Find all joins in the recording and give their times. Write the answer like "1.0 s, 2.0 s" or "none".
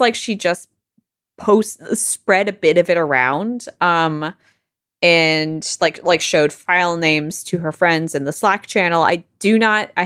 none